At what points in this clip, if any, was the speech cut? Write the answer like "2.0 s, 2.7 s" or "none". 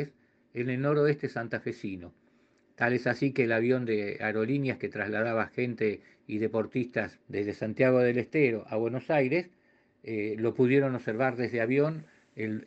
7.2 s